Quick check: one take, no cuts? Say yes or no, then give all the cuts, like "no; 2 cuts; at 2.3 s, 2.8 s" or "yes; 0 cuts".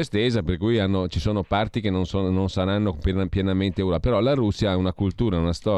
yes; 0 cuts